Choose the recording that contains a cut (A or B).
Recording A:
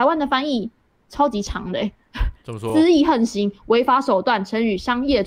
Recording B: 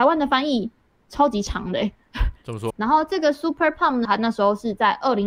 B